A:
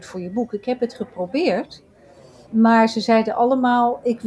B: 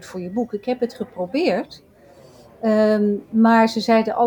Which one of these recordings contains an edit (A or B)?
A